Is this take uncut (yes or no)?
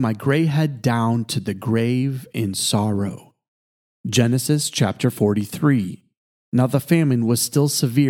yes